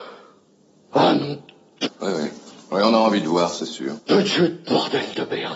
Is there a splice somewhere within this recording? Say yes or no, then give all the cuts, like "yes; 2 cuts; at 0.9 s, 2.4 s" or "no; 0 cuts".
yes; 2 cuts; at 1.8 s, 4.1 s